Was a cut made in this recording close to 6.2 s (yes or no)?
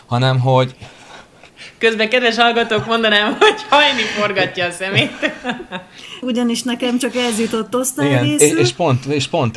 yes